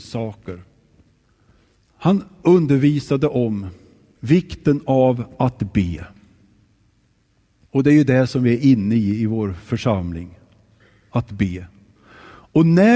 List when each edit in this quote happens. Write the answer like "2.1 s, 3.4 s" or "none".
none